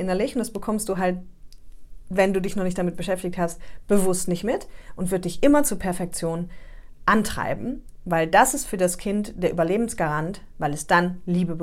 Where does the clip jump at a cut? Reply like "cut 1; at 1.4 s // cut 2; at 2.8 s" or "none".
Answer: none